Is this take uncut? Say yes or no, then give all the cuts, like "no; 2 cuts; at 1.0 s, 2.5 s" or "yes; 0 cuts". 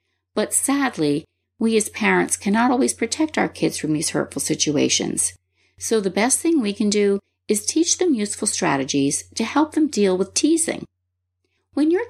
yes; 0 cuts